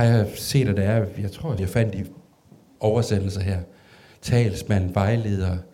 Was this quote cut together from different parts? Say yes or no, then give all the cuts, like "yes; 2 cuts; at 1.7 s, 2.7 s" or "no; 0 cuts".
yes; 1 cut; at 1.6 s